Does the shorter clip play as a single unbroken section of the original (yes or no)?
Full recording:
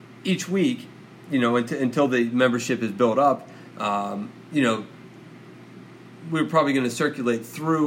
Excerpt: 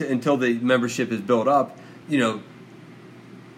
no